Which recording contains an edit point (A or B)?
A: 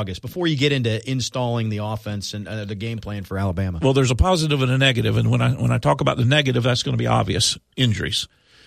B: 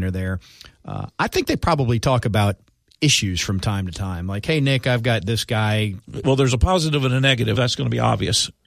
B